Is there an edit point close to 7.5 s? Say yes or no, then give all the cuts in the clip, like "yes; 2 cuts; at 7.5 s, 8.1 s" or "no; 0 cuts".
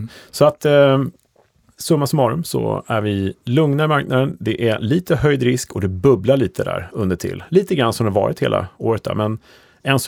no; 0 cuts